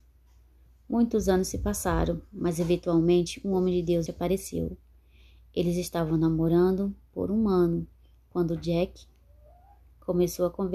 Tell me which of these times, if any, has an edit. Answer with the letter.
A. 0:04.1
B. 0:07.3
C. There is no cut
A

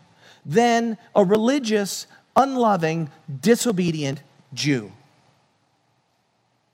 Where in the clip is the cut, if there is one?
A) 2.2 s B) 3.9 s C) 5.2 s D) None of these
D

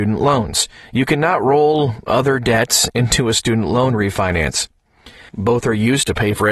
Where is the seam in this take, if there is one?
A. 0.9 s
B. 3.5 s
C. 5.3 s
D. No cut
C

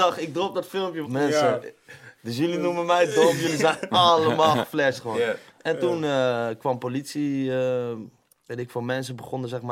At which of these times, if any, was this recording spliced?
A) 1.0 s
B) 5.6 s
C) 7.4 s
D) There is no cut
A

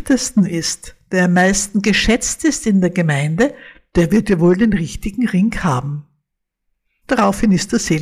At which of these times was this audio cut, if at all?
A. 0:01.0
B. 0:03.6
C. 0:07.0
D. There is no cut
C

